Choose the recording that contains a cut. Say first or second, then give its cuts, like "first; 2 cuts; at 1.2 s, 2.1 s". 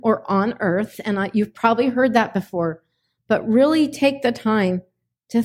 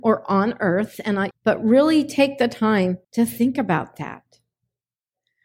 second; 2 cuts; at 1.3 s, 3.0 s